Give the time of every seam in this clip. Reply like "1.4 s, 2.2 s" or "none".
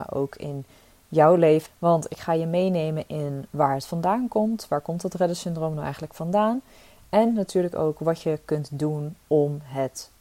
1.7 s